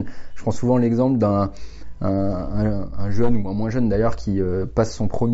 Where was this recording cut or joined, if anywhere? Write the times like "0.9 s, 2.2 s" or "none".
none